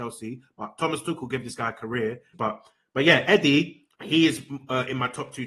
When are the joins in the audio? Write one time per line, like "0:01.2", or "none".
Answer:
0:02.3
0:03.9